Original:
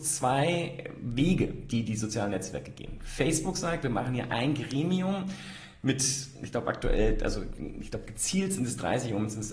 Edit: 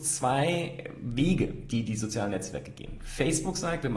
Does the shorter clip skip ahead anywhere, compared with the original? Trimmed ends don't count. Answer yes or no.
no